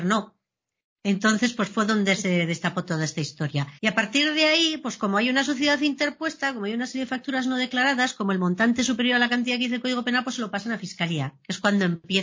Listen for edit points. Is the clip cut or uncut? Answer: cut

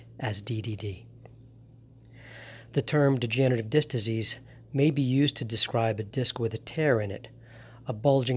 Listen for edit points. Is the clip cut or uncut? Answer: uncut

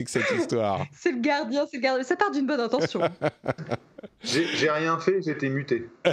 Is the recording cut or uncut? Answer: uncut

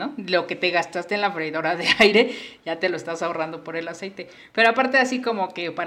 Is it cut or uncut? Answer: uncut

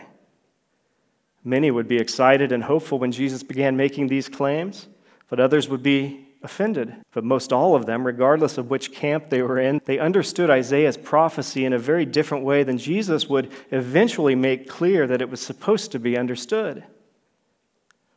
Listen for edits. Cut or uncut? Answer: cut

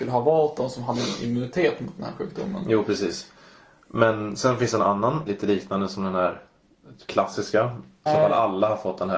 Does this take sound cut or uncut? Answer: cut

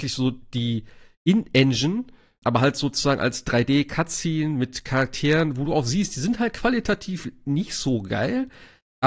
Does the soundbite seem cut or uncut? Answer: cut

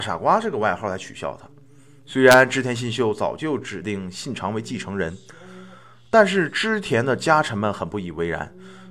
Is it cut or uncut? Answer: uncut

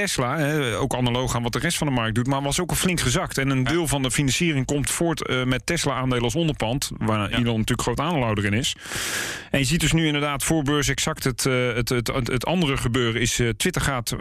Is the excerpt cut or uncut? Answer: uncut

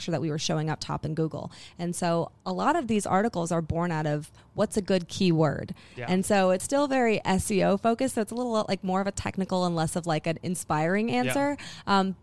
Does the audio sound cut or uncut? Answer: uncut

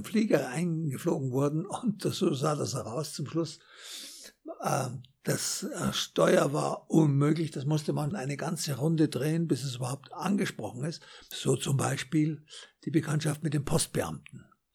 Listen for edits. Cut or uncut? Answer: cut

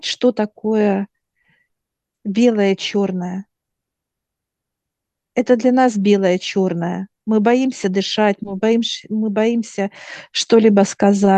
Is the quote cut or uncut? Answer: uncut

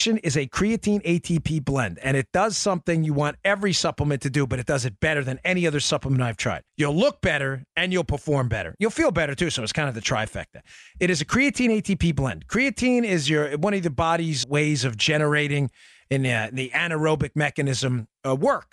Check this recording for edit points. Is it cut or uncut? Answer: cut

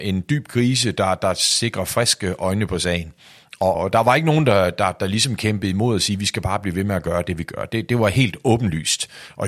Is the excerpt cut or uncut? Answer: cut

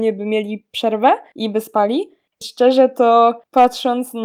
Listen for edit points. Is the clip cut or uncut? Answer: cut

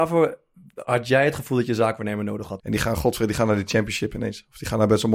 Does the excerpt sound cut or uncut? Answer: cut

